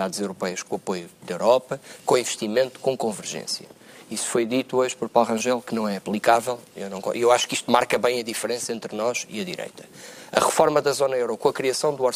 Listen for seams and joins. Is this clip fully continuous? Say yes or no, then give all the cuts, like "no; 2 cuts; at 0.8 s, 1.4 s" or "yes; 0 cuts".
yes; 0 cuts